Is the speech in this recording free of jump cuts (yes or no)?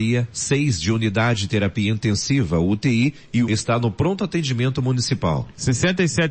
no